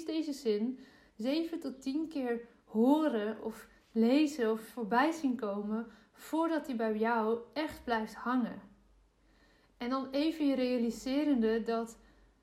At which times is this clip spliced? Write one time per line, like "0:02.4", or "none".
none